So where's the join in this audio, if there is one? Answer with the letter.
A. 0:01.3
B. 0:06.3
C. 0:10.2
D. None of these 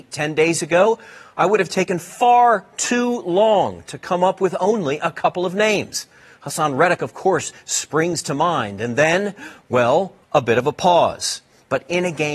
C